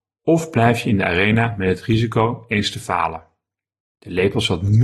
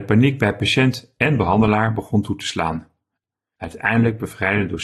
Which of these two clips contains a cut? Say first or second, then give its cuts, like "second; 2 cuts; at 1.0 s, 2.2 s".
first; 1 cut; at 3.9 s